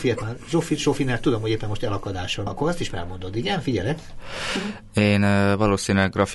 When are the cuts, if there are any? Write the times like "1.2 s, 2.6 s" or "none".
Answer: 2.5 s